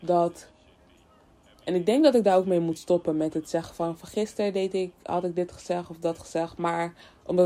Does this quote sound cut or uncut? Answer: uncut